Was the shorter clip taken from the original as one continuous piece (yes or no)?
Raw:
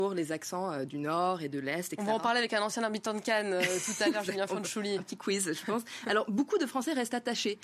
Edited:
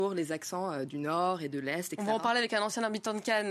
yes